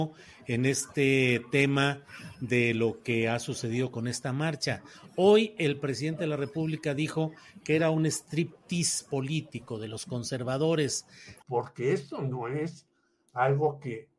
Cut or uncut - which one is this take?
cut